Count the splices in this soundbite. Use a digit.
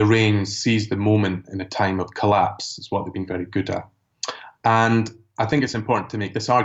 0